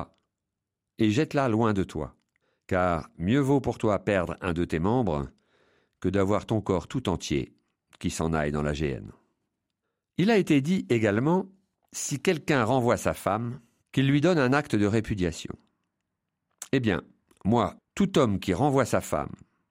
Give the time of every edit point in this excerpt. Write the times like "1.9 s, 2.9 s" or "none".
17.8 s